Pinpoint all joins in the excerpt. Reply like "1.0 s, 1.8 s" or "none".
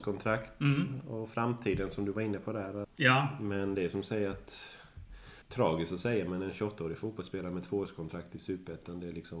2.8 s, 5.4 s